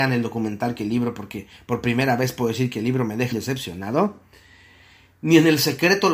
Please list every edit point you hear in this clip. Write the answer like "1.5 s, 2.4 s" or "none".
3.3 s

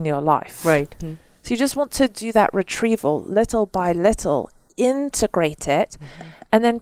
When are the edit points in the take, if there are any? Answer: 1.0 s

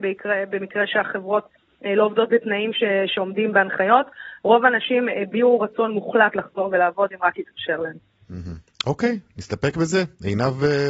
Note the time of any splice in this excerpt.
none

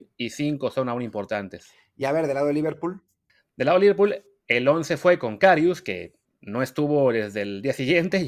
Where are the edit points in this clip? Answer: none

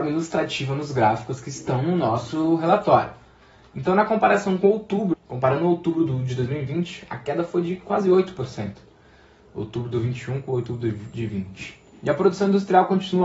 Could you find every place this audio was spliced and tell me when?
5.1 s

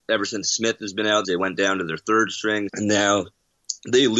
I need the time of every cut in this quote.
1.2 s, 2.7 s

